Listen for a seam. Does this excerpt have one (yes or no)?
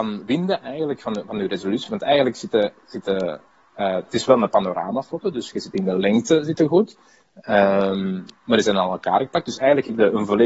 no